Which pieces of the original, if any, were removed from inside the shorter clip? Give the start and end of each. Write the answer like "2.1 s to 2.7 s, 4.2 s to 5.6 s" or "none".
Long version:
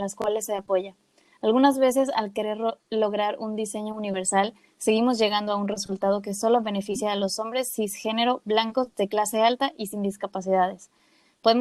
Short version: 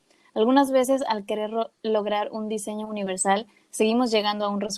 none